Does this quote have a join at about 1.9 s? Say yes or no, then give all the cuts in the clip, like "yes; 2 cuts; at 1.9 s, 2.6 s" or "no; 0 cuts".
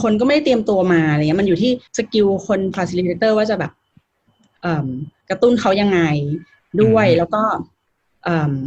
yes; 1 cut; at 1.9 s